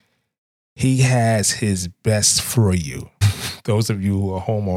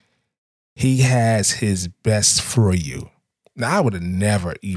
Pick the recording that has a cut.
first; 1 cut; at 3.2 s

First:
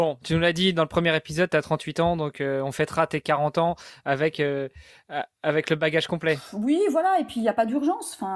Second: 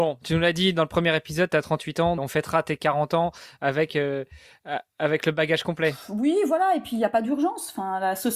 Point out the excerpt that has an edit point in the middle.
second; 1 cut; at 2.2 s

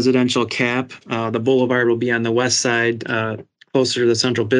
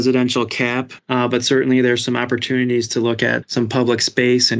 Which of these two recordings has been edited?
second; 2 cuts; at 1.0 s, 3.4 s

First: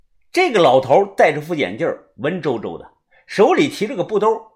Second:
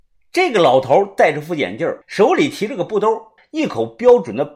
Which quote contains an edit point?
second; 2 cuts; at 2.0 s, 3.4 s

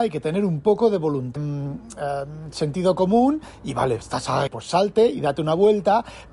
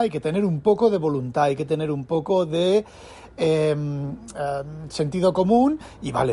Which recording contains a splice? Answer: first; 2 cuts; at 1.4 s, 4.5 s

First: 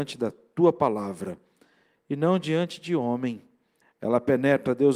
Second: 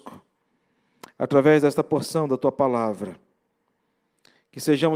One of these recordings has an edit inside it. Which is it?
first; 1 cut; at 3.8 s

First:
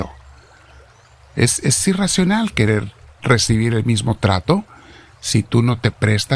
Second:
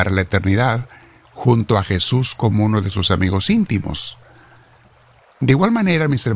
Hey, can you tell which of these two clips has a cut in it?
second; 1 cut; at 5.2 s

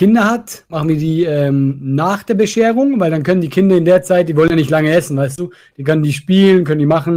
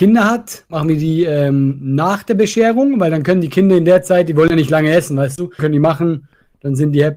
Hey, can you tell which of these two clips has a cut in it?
second; 1 cut; at 5.6 s

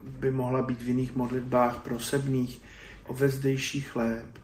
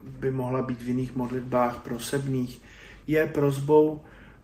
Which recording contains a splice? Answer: first; 1 cut; at 3.0 s

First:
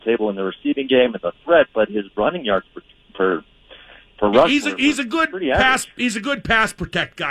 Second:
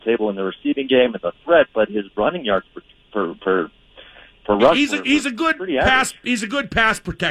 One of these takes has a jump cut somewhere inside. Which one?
first; 1 cut; at 3.1 s

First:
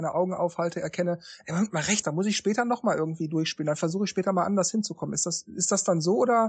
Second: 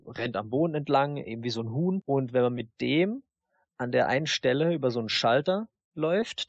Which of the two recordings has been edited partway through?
first; 1 cut; at 2.0 s

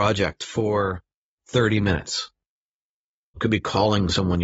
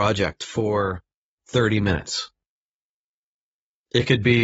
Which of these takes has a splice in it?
first; 1 cut; at 3.4 s

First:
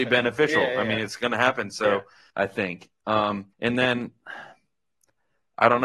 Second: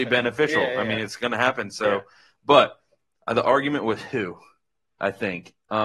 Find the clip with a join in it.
first; 2 cuts; at 2.3 s, 3.5 s

